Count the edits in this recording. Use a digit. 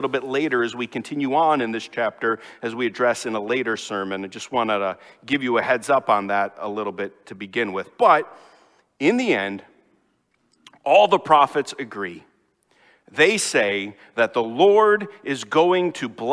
0